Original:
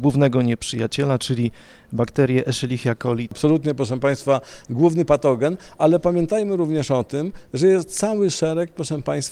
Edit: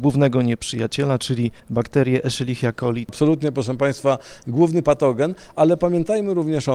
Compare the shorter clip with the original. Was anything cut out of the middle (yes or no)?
yes